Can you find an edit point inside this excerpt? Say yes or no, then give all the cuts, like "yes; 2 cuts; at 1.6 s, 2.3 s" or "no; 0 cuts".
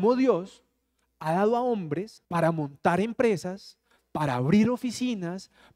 yes; 1 cut; at 2.2 s